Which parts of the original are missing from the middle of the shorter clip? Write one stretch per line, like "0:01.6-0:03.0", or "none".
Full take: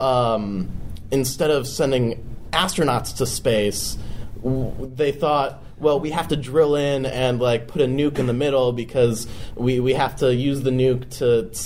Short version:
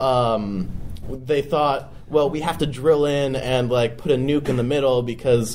0:01.0-0:04.7